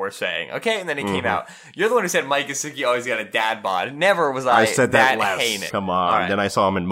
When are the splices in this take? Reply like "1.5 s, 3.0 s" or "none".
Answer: 5.7 s